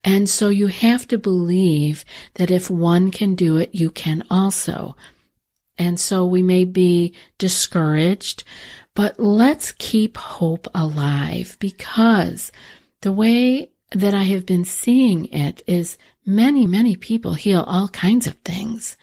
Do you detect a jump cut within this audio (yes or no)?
yes